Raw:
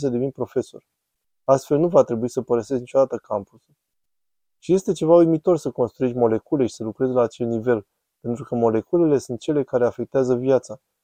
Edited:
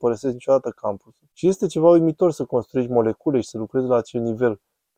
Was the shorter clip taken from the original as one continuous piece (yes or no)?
no